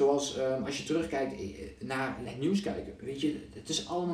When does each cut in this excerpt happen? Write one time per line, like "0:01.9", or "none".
0:02.3